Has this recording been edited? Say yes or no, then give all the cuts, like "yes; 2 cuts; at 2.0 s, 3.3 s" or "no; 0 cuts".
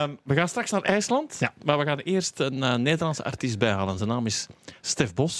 no; 0 cuts